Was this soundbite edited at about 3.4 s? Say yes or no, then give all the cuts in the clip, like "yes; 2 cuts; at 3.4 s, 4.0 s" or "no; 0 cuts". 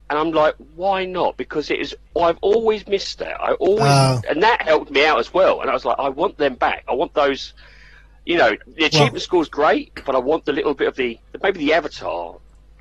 no; 0 cuts